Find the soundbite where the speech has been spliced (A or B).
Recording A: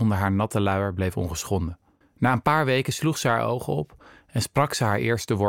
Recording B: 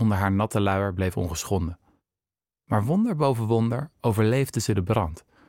A